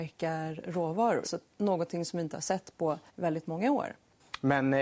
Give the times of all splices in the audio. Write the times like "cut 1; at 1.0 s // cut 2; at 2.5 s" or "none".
cut 1; at 1.2 s // cut 2; at 3.1 s

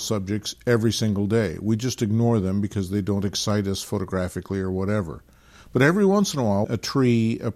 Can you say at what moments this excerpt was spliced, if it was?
cut 1; at 6.6 s

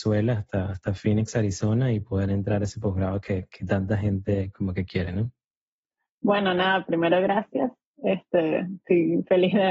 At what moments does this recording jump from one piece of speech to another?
none

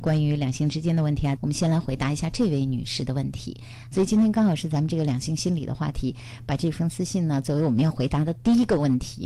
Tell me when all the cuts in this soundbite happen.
cut 1; at 1.4 s // cut 2; at 3.9 s

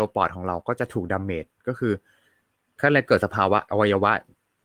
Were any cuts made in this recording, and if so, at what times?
cut 1; at 3.7 s

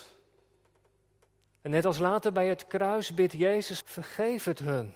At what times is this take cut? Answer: cut 1; at 3.8 s

